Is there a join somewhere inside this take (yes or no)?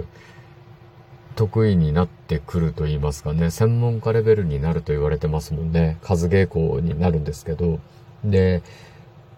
no